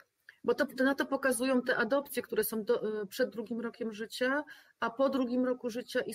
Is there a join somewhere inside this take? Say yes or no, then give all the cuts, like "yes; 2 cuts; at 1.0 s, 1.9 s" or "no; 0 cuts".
no; 0 cuts